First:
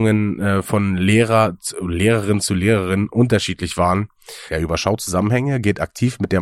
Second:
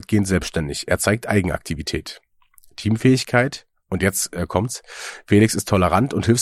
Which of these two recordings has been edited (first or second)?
first